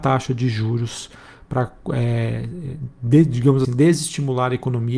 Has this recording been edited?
yes; 1 cut; at 3.6 s

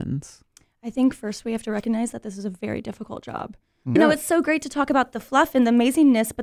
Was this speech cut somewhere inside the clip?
yes; 1 cut; at 4.0 s

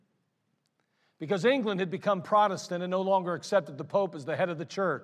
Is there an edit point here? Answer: no; 0 cuts

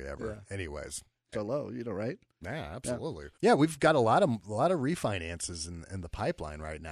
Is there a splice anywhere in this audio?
yes; 2 cuts; at 1.3 s, 3.3 s

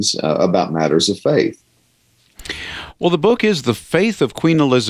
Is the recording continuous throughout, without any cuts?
yes; 0 cuts

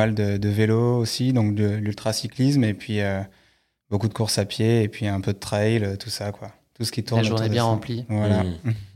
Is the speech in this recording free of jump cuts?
yes; 0 cuts

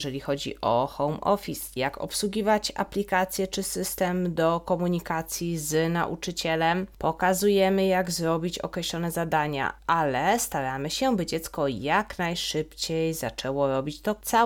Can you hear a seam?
yes; 1 cut; at 1.8 s

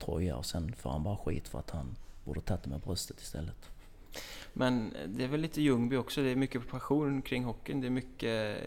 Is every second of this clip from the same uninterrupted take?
yes; 0 cuts

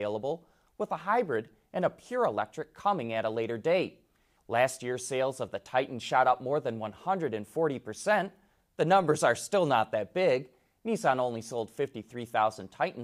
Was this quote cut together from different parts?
yes; 1 cut; at 4.4 s

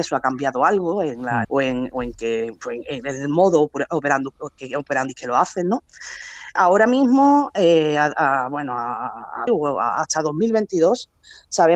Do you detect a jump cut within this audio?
yes; 3 cuts; at 1.4 s, 6.6 s, 9.5 s

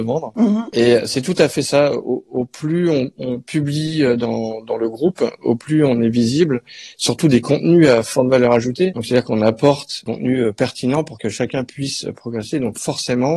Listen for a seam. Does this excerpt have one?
no; 0 cuts

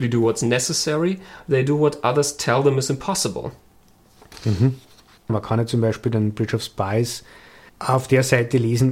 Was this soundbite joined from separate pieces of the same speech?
yes; 2 cuts; at 5.3 s, 7.7 s

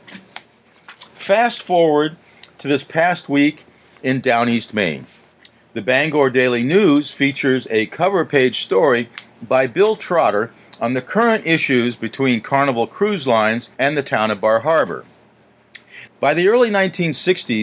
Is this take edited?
yes; 2 cuts; at 13.7 s, 16.1 s

